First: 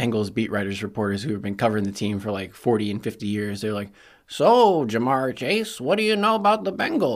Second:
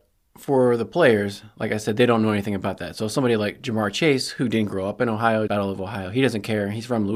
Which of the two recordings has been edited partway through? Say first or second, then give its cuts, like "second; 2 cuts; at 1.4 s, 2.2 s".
second; 1 cut; at 5.5 s